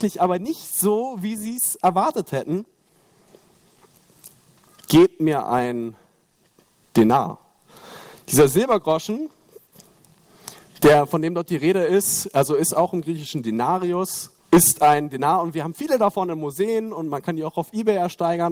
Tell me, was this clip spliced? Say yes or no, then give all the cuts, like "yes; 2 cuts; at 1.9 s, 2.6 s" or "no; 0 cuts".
yes; 2 cuts; at 4.7 s, 14.4 s